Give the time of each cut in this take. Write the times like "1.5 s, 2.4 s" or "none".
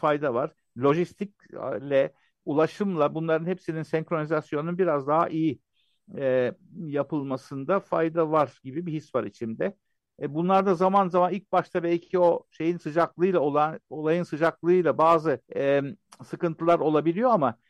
10.1 s, 15.5 s